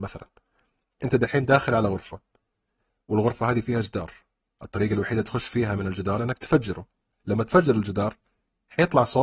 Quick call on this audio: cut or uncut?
uncut